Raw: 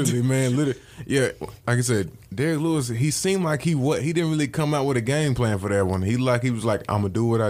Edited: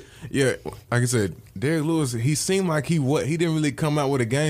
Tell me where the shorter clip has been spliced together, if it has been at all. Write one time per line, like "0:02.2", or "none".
none